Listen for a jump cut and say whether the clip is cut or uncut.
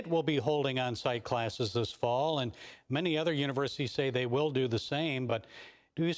uncut